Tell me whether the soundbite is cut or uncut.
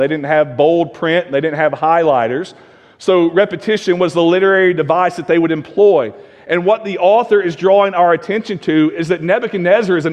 uncut